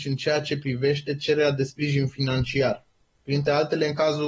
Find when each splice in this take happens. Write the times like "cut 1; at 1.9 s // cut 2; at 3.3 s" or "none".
none